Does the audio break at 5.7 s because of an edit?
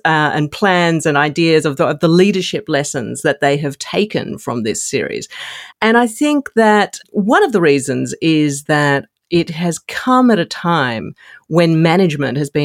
no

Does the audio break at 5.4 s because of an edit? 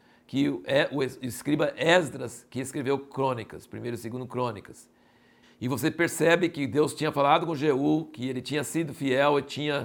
yes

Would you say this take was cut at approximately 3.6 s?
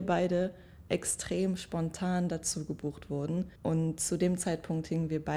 yes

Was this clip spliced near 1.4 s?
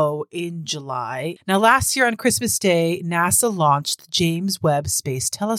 yes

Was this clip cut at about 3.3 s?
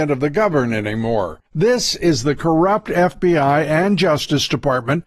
no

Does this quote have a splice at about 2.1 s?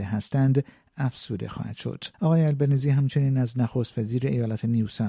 yes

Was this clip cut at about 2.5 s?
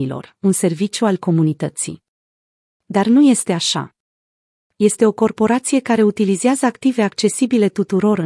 no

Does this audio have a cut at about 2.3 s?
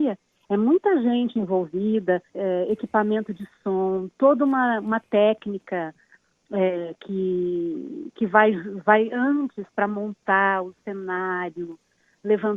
yes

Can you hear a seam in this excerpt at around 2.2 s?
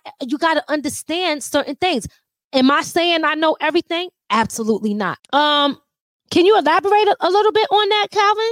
no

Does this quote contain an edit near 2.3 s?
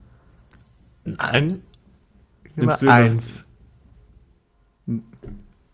no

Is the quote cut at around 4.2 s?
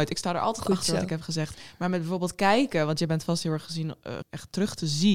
yes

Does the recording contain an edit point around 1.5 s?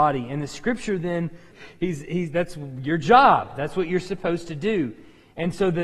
yes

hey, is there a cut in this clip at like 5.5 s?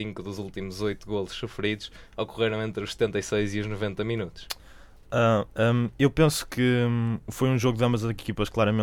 yes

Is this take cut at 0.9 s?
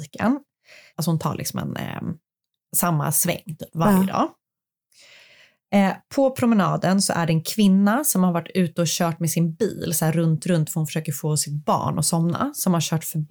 yes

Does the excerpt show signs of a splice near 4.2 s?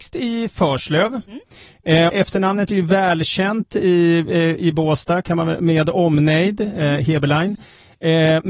no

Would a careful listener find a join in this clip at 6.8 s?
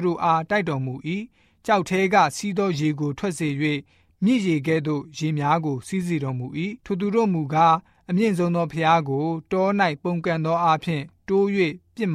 yes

